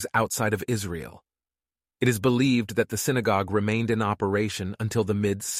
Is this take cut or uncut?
uncut